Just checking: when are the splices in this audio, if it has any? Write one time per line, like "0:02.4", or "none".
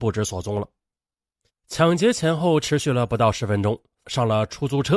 0:01.5
0:04.0